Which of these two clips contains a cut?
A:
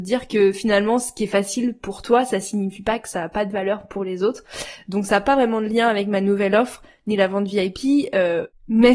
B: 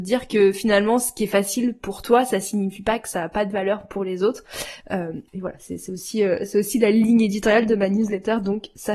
B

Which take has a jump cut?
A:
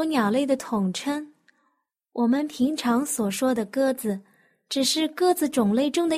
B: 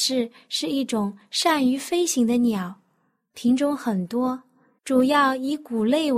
B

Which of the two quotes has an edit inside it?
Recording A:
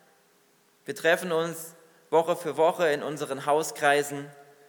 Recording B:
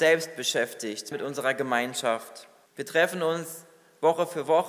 B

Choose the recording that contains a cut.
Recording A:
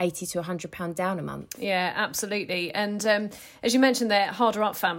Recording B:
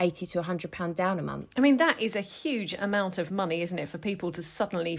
B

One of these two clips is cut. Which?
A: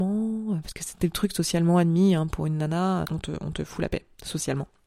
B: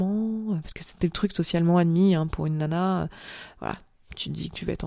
A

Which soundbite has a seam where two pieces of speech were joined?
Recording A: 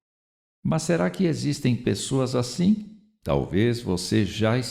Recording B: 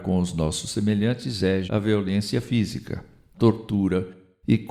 B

